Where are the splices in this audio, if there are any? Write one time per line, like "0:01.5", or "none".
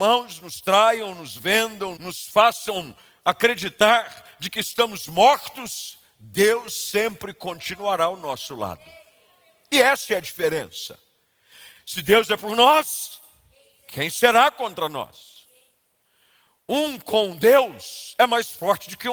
0:02.0